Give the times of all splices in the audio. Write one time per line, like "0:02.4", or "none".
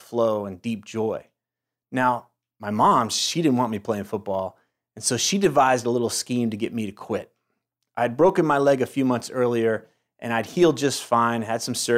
none